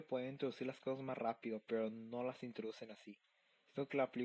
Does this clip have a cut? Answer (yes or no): no